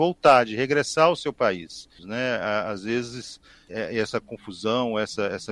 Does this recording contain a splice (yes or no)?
yes